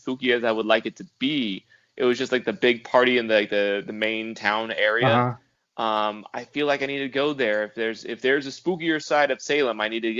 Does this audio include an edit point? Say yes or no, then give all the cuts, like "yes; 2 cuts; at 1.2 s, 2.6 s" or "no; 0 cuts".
no; 0 cuts